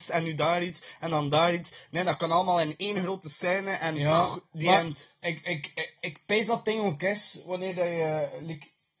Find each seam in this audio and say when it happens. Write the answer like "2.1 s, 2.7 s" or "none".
none